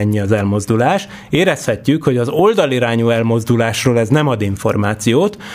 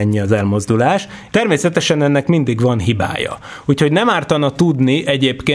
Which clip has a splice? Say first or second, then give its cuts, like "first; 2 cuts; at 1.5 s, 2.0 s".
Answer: second; 1 cut; at 1.3 s